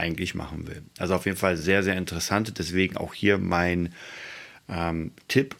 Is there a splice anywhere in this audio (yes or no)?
no